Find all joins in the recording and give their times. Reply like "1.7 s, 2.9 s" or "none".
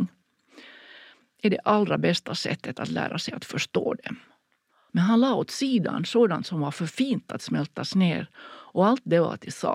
4.9 s